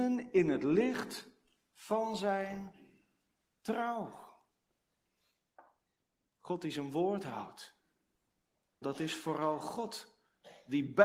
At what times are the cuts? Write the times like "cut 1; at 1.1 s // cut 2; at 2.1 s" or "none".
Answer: cut 1; at 8.8 s